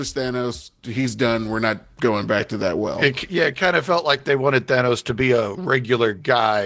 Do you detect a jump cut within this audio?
no; 0 cuts

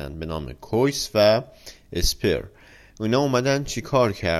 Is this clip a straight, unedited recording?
yes; 0 cuts

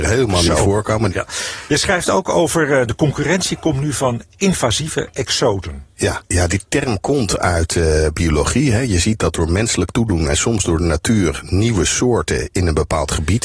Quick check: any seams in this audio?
yes; 2 cuts; at 1.1 s, 6.2 s

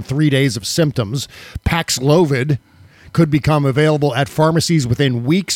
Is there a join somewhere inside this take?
no; 0 cuts

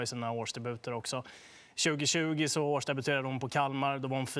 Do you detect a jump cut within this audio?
no; 0 cuts

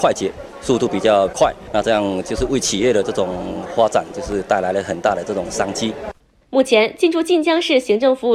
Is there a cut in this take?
no; 0 cuts

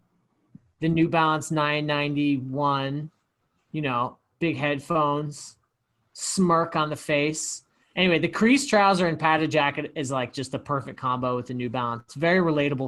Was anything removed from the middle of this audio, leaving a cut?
no; 0 cuts

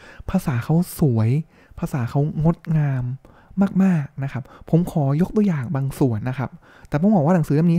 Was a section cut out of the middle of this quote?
yes; 1 cut; at 6.2 s

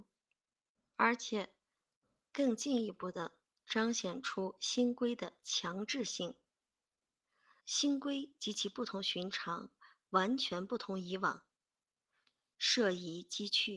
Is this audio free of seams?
no; 1 cut; at 7.6 s

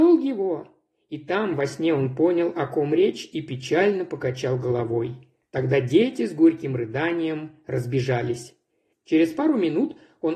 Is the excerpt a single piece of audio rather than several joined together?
no; 1 cut; at 8.9 s

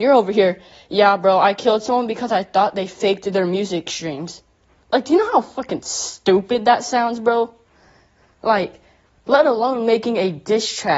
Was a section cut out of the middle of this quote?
no; 0 cuts

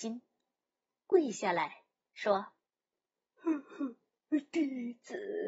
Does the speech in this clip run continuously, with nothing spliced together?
yes; 0 cuts

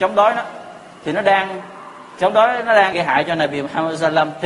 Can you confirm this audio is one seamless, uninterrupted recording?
no; 1 cut; at 2.9 s

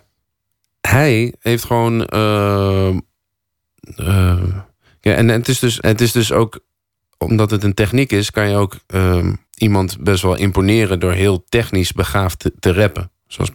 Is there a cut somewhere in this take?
yes; 2 cuts; at 5.8 s, 9.5 s

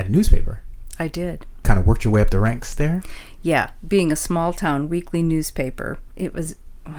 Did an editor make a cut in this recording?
no; 0 cuts

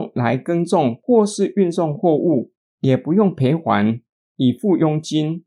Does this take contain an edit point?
yes; 1 cut; at 4.3 s

